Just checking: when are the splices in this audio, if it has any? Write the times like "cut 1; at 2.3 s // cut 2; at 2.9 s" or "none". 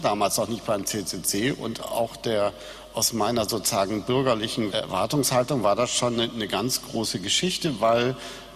cut 1; at 4.7 s

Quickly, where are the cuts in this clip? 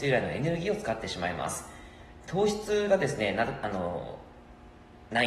none

